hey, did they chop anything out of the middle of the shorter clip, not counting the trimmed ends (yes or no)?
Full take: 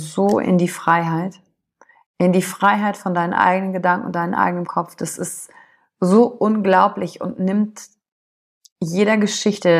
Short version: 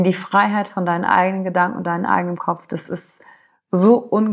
no